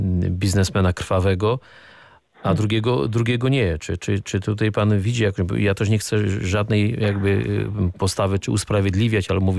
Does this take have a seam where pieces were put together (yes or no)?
no